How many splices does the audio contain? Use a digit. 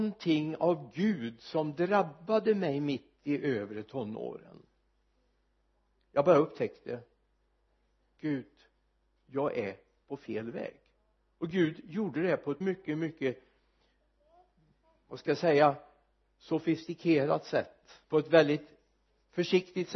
2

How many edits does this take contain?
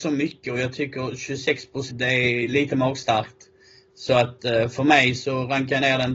1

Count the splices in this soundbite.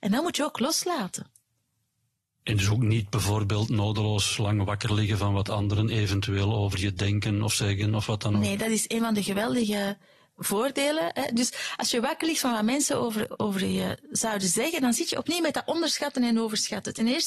0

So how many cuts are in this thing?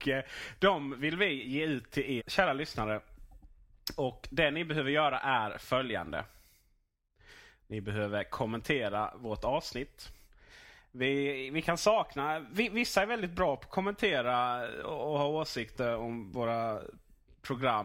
1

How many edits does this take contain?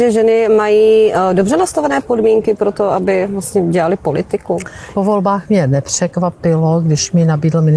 1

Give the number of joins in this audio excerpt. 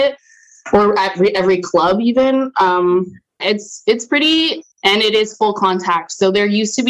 2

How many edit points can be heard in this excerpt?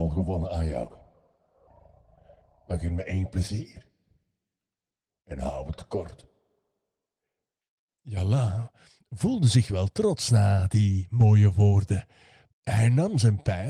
1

